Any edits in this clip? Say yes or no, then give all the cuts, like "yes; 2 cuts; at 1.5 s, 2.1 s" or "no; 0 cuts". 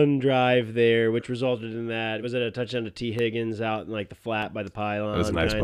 no; 0 cuts